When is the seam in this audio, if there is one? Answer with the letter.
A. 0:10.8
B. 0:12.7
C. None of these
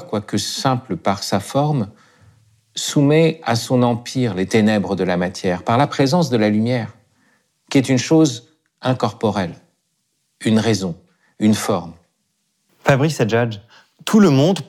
B